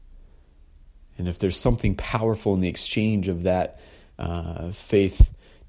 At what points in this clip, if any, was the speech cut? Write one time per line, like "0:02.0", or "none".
none